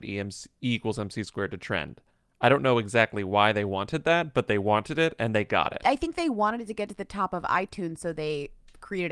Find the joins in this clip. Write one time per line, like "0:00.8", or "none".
none